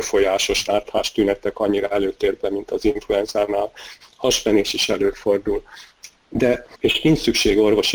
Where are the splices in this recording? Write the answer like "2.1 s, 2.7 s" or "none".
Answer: 6.7 s